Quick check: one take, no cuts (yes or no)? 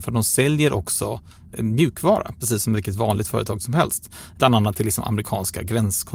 yes